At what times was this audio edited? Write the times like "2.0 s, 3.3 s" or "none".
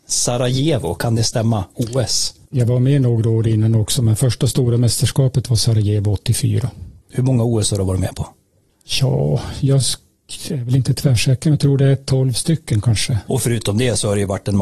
2.5 s, 13.3 s